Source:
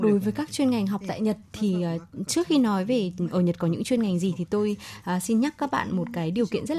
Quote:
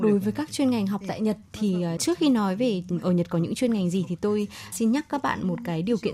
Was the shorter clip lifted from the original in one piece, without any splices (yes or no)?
no